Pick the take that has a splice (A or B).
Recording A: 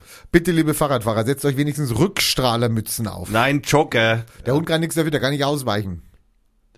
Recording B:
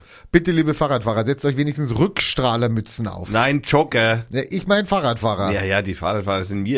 A